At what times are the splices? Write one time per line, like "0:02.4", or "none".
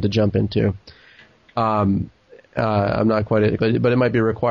0:03.6